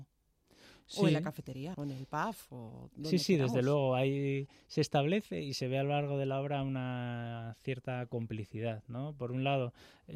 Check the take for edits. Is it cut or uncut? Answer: cut